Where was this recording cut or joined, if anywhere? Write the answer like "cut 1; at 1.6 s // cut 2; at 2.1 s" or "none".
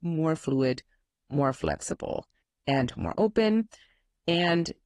none